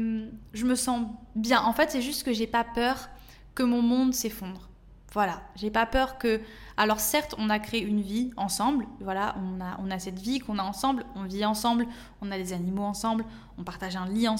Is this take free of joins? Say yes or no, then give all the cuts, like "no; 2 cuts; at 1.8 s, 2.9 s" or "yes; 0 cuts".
yes; 0 cuts